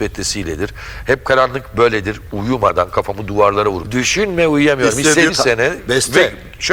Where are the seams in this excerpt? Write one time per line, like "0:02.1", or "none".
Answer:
0:03.8
0:05.3